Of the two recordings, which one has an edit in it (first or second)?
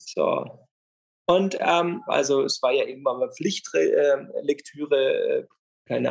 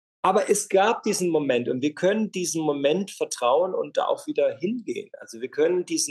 first